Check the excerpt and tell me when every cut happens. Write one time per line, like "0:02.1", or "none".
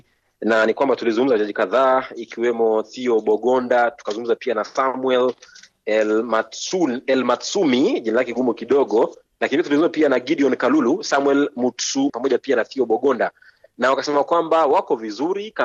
0:12.1